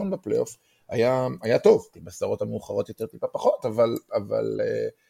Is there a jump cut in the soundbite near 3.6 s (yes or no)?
no